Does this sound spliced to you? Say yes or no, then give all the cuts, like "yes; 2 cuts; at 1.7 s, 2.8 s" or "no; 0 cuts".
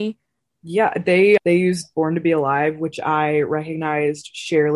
yes; 1 cut; at 1.4 s